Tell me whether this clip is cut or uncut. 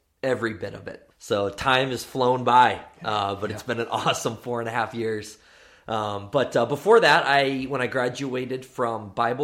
cut